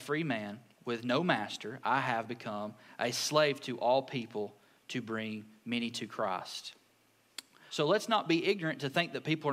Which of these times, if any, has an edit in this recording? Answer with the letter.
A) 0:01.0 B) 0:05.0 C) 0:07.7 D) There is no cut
C